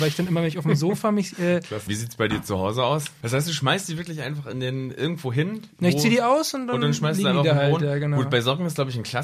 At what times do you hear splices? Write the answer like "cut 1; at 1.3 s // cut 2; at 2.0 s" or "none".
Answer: cut 1; at 1.9 s // cut 2; at 3.2 s